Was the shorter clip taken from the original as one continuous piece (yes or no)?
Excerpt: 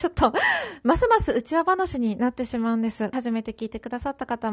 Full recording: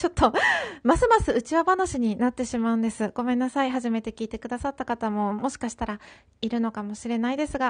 no